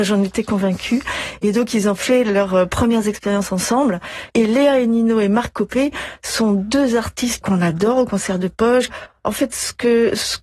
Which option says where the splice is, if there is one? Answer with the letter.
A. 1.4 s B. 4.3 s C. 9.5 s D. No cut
B